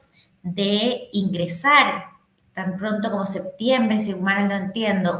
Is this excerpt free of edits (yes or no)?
yes